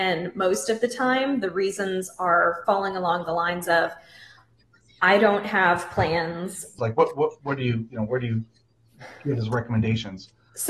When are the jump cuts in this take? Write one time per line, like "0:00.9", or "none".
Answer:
0:06.8